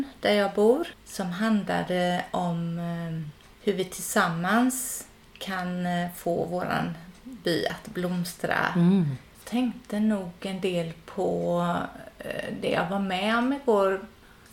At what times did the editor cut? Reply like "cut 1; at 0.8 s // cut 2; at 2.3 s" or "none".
cut 1; at 0.9 s // cut 2; at 9.3 s